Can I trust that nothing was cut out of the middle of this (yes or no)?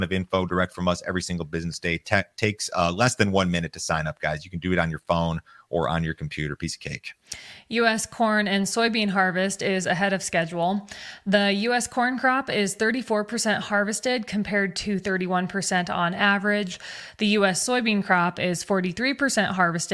yes